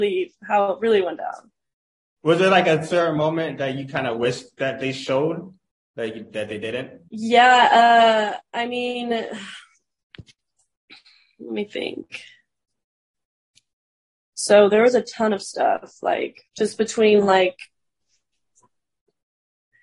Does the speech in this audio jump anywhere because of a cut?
yes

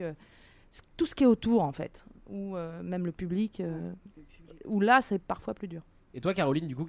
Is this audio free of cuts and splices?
yes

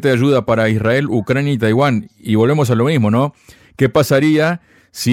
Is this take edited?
no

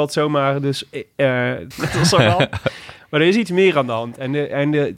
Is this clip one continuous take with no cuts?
no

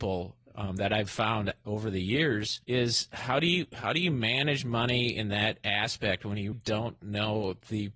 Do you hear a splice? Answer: yes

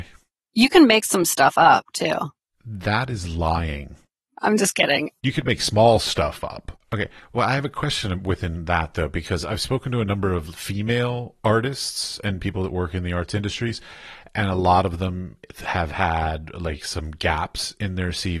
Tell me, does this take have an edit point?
yes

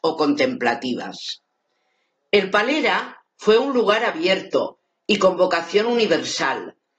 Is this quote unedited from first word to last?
yes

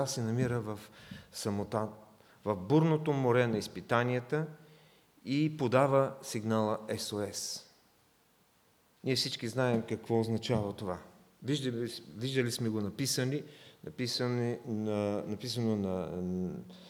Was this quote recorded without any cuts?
yes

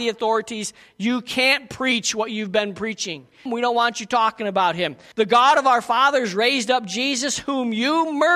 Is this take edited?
yes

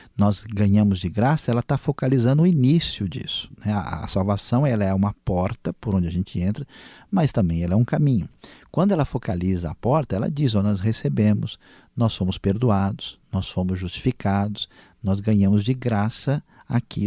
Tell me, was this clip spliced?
no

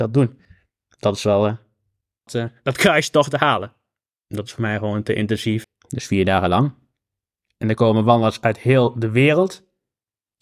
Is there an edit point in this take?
yes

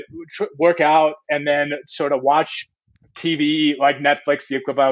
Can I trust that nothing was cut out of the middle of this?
yes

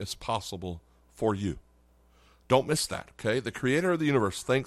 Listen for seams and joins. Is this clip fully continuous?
yes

